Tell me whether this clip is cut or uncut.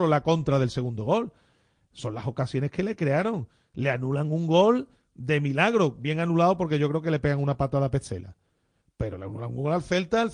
uncut